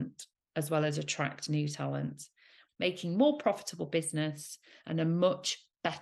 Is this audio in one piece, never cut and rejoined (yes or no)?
no